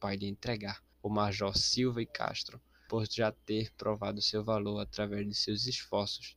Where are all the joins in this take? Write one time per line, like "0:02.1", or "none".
0:00.9
0:02.9